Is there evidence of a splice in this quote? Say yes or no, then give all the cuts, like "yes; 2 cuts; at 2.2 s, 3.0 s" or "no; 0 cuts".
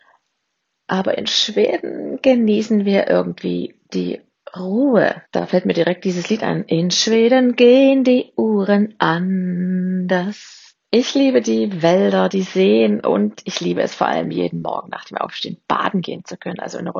yes; 2 cuts; at 5.3 s, 10.8 s